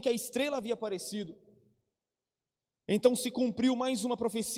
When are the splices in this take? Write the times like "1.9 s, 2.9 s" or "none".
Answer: none